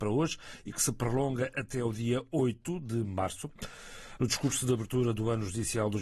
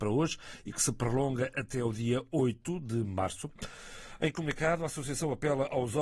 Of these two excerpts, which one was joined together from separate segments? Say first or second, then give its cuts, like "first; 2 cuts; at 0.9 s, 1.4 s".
first; 1 cut; at 4.2 s